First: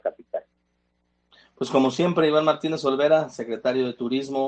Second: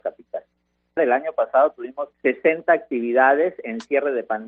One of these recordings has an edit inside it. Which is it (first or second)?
second